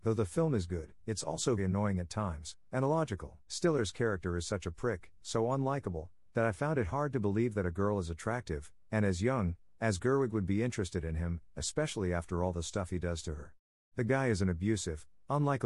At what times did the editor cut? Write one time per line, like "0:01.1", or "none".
0:01.6
0:03.4
0:13.9